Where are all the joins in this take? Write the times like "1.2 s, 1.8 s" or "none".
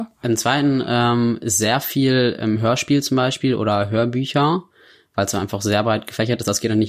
none